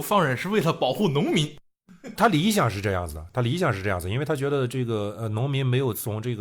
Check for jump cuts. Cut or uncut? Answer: cut